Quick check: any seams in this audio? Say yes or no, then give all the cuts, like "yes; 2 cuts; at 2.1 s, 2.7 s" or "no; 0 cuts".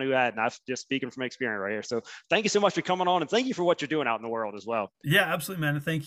yes; 1 cut; at 4.9 s